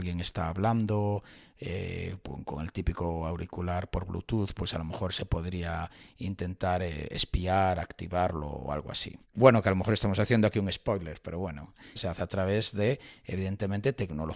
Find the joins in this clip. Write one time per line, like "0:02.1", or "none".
0:09.2
0:12.0